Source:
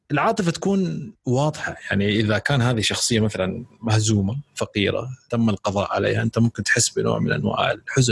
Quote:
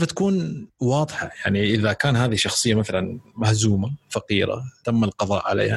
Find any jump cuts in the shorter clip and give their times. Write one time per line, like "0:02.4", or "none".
none